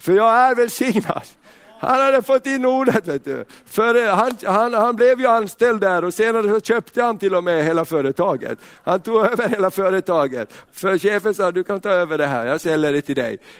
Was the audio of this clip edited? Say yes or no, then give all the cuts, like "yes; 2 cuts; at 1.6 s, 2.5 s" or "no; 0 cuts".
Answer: no; 0 cuts